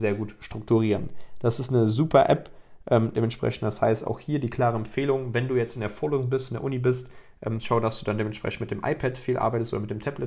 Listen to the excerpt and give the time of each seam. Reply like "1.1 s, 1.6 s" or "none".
none